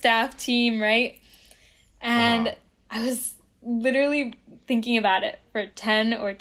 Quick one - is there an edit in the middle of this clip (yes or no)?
no